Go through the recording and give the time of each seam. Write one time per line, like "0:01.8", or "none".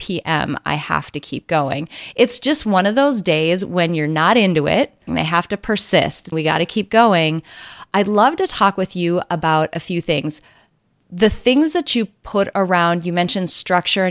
0:05.1
0:06.3

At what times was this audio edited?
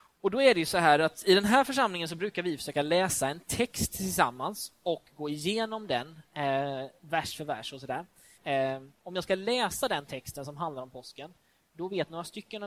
0:08.4

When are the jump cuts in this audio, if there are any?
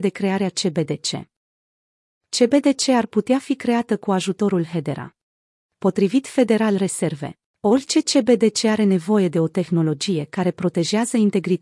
0:02.1

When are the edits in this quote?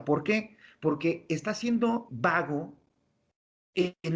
0:02.1

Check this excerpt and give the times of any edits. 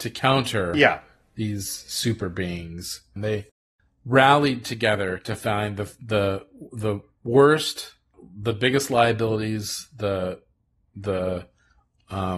0:03.2

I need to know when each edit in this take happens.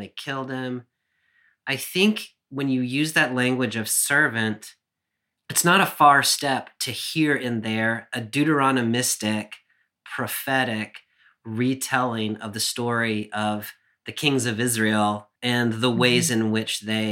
0:05.4
0:15.4

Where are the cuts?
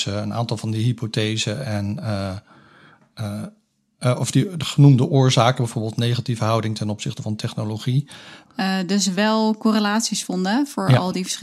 0:08.4

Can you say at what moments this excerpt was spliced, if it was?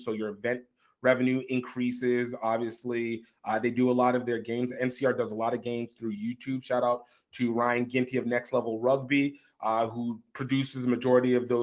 none

